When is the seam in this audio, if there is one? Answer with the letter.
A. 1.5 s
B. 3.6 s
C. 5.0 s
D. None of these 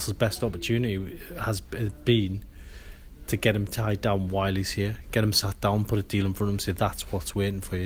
D